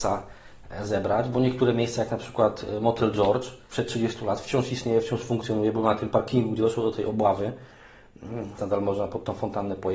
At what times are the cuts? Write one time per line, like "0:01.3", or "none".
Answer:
0:08.6